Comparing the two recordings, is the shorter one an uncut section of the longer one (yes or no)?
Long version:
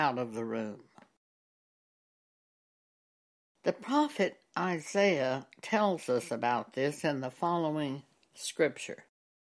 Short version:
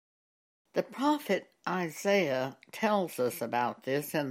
yes